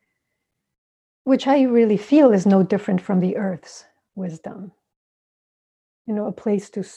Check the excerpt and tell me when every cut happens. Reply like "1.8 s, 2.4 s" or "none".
5.9 s